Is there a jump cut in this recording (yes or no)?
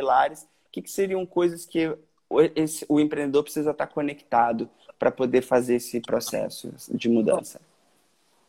no